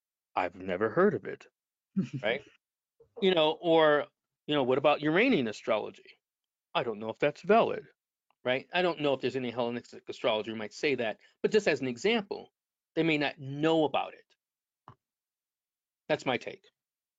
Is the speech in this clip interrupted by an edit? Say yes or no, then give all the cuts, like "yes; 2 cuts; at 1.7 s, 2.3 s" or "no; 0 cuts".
no; 0 cuts